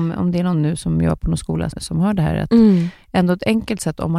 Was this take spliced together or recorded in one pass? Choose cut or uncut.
cut